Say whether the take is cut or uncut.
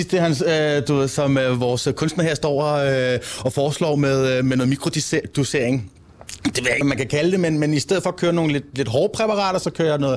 cut